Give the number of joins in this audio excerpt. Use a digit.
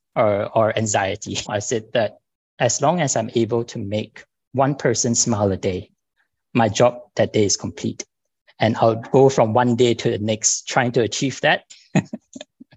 2